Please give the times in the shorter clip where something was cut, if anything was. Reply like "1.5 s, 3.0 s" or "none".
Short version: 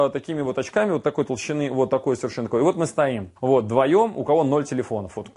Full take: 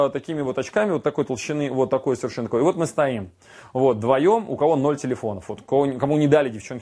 3.4 s